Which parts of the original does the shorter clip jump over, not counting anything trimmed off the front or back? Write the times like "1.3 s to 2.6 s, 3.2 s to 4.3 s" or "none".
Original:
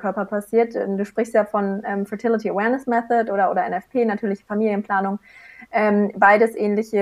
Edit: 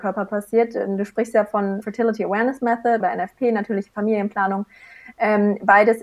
1.8 s to 2.1 s, 3.3 s to 3.5 s